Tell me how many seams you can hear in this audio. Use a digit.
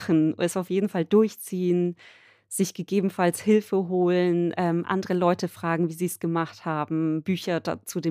0